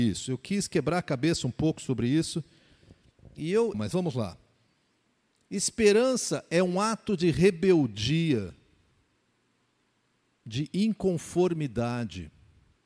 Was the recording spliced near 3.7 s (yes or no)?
yes